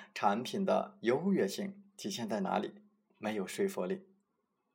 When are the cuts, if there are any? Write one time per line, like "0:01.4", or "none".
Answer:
0:03.1